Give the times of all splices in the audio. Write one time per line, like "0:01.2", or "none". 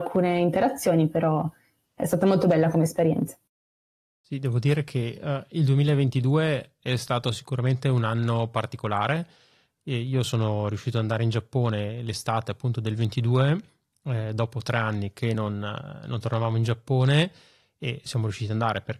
none